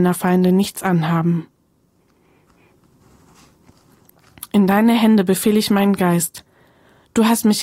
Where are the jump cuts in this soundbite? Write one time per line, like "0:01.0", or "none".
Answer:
none